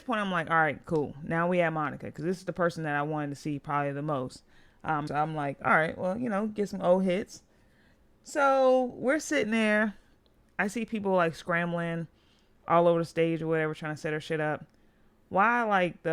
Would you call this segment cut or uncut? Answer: cut